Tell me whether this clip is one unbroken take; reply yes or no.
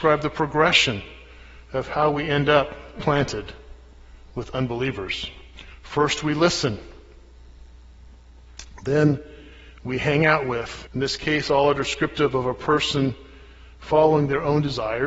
no